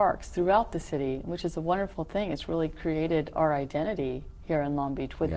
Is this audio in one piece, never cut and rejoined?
yes; 0 cuts

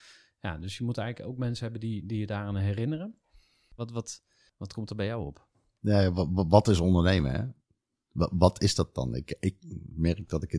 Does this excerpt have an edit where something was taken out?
yes; 1 cut; at 3.8 s

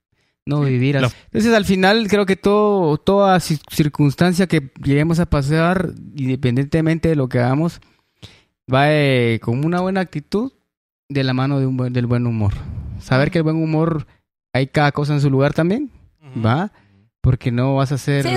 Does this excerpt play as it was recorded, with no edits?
no; 1 cut; at 1.1 s

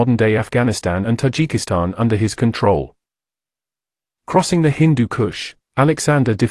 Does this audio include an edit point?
no; 0 cuts

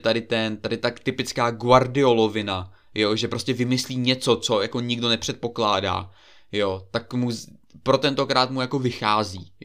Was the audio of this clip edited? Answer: no; 0 cuts

